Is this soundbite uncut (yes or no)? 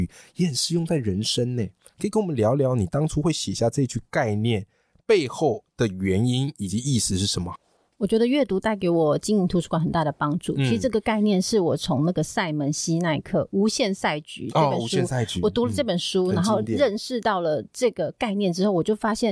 yes